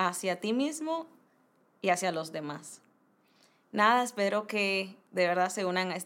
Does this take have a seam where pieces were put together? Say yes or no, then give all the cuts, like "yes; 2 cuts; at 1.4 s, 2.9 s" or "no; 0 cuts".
no; 0 cuts